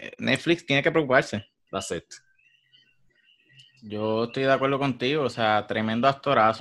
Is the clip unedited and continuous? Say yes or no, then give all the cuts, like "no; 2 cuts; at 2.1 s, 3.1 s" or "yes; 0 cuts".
no; 1 cut; at 1.7 s